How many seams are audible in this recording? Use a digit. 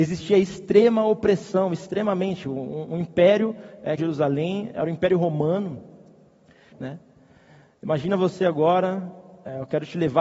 2